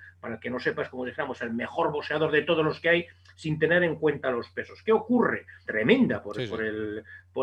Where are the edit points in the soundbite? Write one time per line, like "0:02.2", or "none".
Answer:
0:05.7